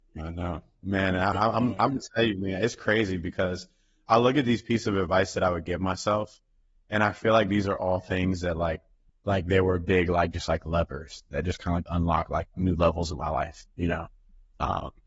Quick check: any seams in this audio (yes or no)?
yes